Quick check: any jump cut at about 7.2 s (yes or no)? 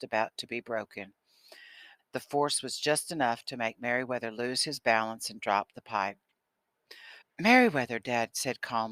yes